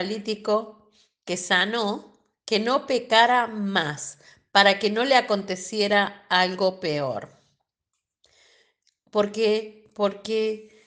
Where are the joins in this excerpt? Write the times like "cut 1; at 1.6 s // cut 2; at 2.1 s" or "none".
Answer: none